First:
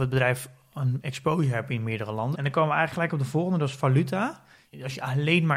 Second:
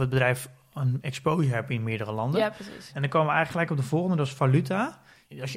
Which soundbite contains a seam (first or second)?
first